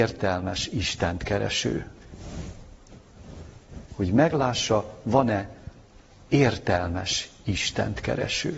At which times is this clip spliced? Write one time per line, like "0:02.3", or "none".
0:03.9